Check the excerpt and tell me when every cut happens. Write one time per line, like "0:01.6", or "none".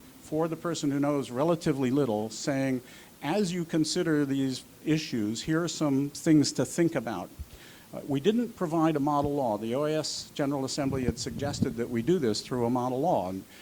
none